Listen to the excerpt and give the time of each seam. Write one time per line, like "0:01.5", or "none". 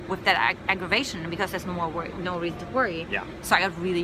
none

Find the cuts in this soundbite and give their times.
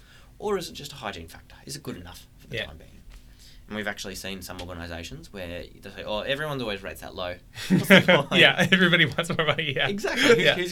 none

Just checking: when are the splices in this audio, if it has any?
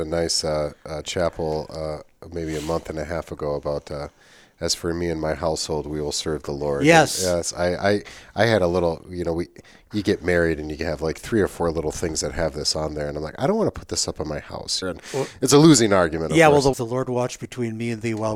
0:14.8
0:16.7

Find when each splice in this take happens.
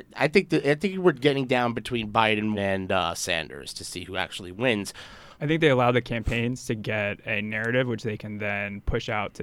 0:02.5
0:05.4

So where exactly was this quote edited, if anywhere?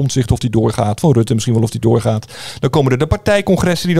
0:01.0

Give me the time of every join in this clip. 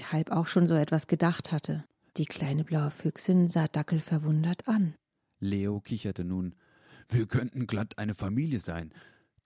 0:02.1

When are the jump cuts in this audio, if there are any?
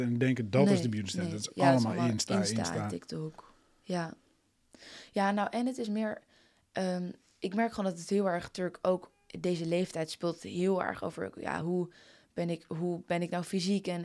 none

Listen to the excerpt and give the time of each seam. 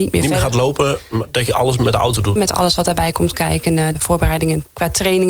0:02.4
0:03.9

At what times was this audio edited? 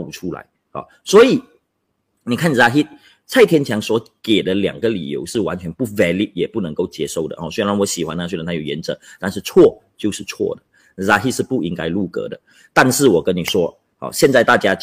none

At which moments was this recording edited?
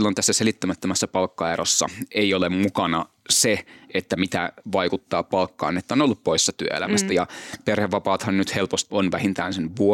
0:08.9

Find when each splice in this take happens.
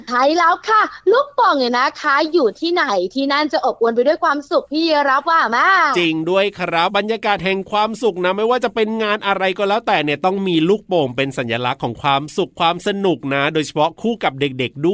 0:06.9

